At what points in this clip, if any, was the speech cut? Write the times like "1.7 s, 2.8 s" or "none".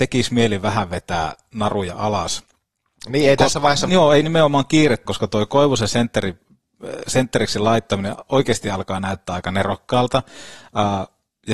3.9 s, 5.1 s